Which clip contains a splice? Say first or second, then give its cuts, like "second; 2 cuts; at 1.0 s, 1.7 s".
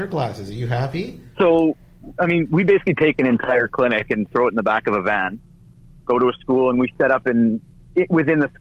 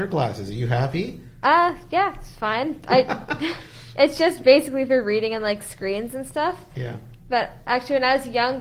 first; 1 cut; at 1.3 s